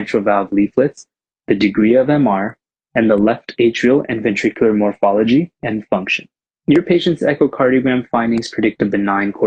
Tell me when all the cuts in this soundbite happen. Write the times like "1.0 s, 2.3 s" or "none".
6.5 s